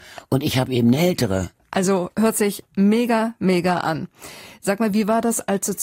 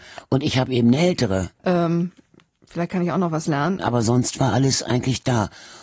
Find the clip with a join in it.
second; 2 cuts; at 1.6 s, 3.8 s

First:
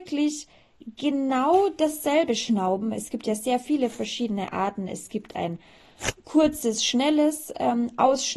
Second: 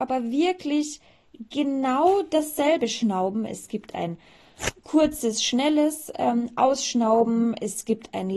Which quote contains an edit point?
second; 1 cut; at 3.5 s

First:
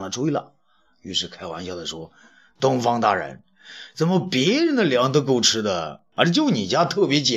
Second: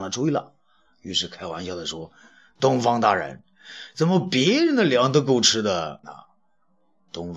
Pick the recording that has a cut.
second; 1 cut; at 6.0 s

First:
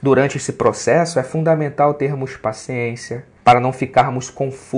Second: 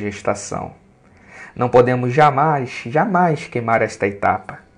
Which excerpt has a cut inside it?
first; 1 cut; at 3.4 s

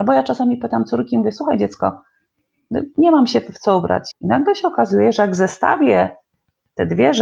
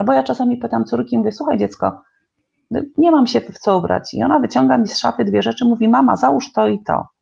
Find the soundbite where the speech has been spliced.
first; 1 cut; at 4.1 s

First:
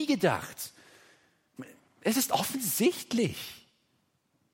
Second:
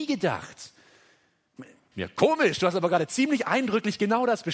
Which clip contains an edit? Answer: second; 1 cut; at 1.9 s

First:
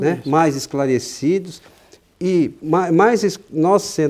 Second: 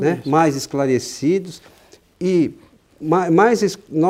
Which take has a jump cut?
first; 1 cut; at 2.6 s

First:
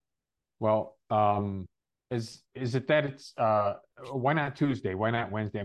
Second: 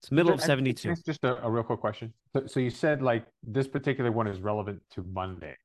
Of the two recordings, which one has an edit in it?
second; 1 cut; at 2.2 s

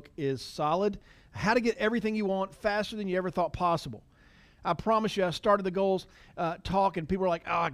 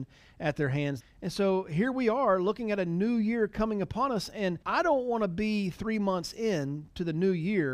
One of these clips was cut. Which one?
second; 2 cuts; at 1.0 s, 4.6 s

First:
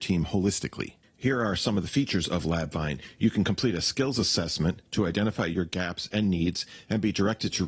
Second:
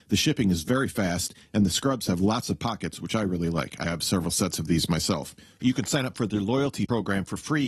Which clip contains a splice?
second; 2 cuts; at 3.8 s, 5.6 s

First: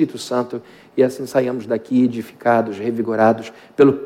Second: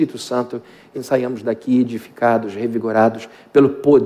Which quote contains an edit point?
second; 1 cut; at 0.9 s

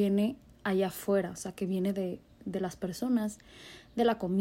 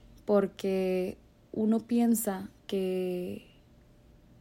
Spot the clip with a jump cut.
second; 1 cut; at 2.6 s

